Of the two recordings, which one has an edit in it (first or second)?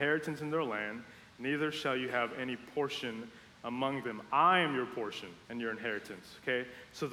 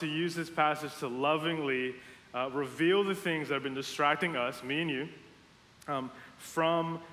first